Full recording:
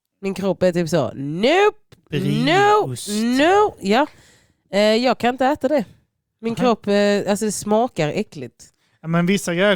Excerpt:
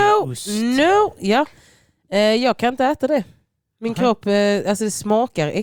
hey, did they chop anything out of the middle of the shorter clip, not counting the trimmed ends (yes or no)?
no